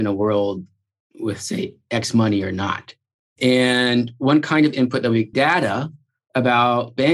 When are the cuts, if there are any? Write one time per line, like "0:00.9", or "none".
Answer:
0:05.3